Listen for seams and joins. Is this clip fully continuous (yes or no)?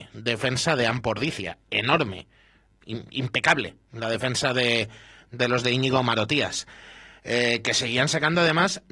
yes